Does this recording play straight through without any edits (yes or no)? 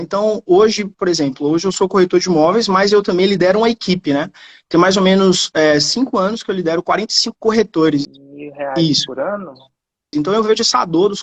no